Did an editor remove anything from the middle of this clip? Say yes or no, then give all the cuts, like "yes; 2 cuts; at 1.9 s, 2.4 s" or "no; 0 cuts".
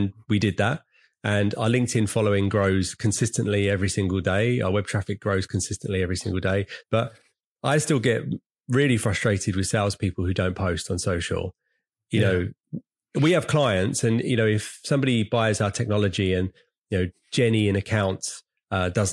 yes; 1 cut; at 6.8 s